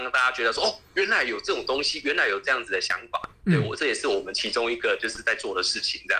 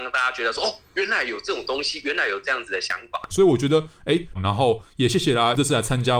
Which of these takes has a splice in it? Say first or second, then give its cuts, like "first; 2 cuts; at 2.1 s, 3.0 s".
second; 2 cuts; at 3.3 s, 4.3 s